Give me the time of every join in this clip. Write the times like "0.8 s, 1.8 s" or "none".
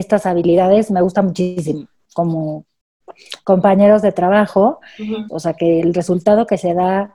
2.0 s, 5.3 s